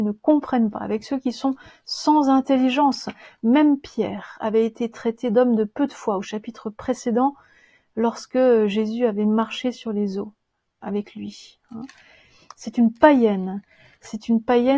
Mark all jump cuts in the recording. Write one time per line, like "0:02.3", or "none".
none